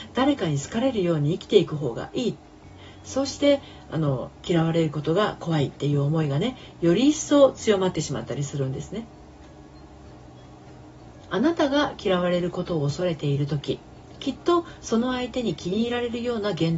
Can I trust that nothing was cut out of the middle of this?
no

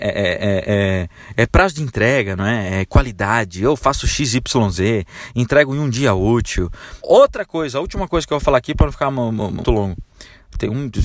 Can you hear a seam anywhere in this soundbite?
yes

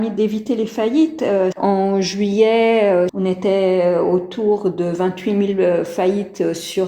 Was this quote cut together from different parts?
yes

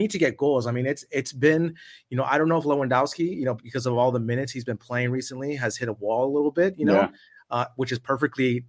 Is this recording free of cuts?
yes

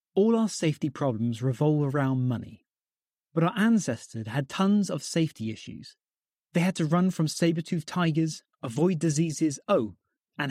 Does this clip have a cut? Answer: yes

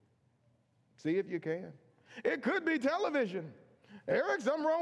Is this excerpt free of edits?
yes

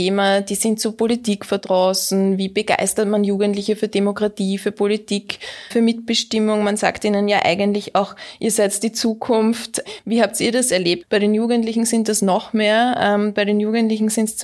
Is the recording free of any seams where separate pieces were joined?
no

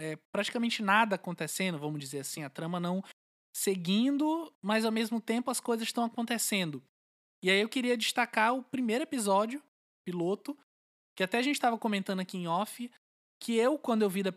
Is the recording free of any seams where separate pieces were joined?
yes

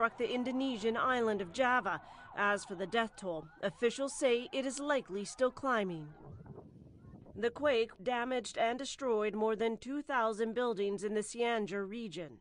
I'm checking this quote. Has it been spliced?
yes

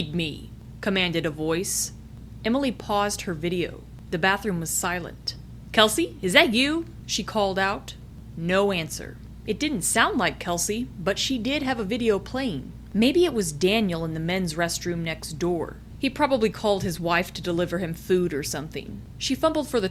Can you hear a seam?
no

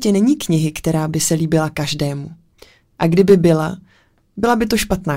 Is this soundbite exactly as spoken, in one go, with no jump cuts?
yes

